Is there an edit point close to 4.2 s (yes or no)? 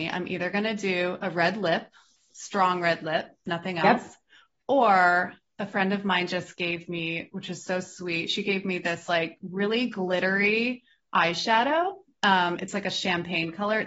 no